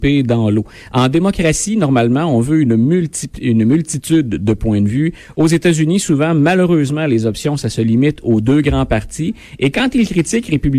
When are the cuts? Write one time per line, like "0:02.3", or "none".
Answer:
none

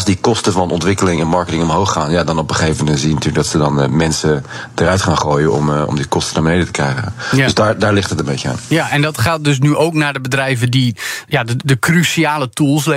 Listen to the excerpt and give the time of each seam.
none

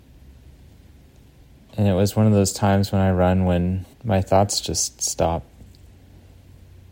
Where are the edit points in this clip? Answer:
0:03.9

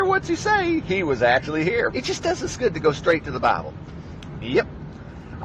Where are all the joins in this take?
0:01.9
0:04.3

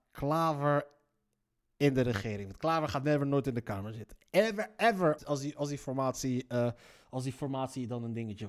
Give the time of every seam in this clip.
0:05.2

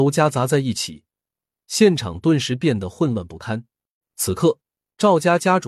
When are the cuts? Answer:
0:04.0

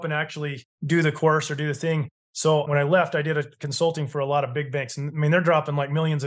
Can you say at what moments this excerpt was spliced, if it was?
none

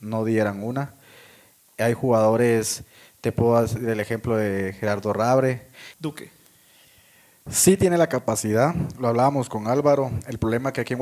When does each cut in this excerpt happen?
0:05.9

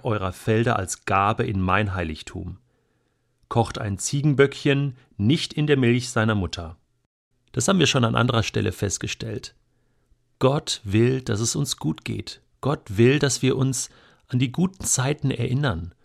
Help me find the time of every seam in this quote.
0:07.3

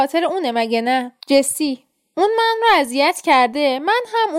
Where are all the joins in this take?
0:01.2

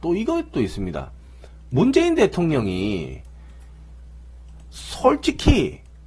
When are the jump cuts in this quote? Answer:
none

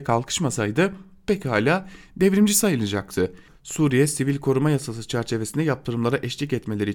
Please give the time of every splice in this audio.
0:03.5

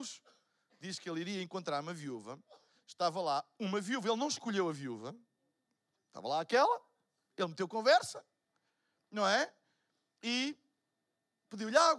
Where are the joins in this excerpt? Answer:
none

